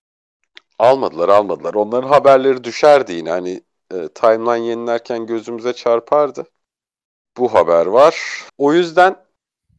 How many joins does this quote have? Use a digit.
2